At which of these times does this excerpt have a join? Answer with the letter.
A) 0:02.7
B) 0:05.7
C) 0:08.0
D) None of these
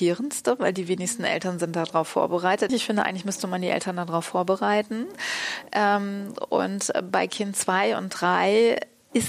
A